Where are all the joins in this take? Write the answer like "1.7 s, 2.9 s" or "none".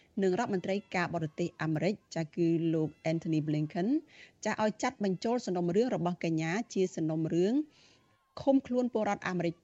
none